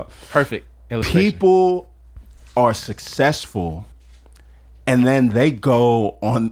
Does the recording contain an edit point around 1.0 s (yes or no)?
no